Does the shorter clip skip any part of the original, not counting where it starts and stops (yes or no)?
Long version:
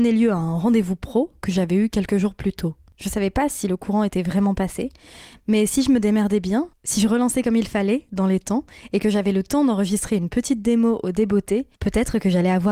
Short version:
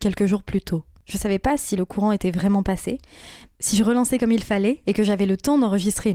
yes